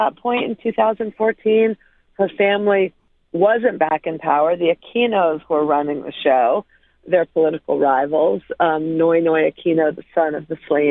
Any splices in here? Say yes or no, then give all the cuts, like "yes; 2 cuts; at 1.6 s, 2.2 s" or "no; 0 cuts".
no; 0 cuts